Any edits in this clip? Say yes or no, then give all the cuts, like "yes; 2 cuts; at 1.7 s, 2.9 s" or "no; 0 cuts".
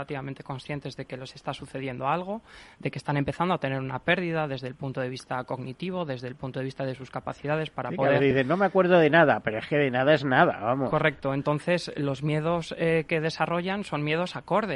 no; 0 cuts